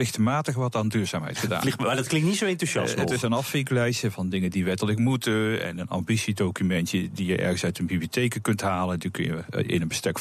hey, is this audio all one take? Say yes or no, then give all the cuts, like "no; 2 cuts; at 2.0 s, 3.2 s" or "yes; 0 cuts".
yes; 0 cuts